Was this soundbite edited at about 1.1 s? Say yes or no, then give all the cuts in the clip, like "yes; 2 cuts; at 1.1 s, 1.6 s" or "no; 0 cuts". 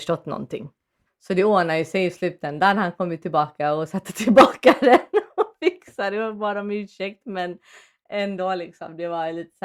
yes; 1 cut; at 1.1 s